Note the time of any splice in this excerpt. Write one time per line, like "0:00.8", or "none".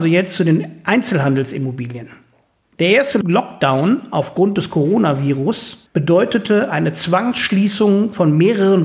none